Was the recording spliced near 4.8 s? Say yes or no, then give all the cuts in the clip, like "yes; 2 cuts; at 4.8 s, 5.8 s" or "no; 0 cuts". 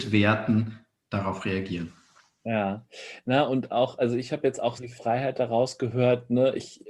yes; 1 cut; at 4.8 s